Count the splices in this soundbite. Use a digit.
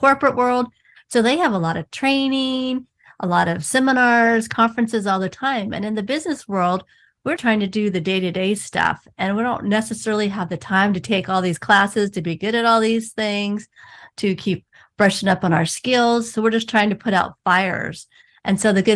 1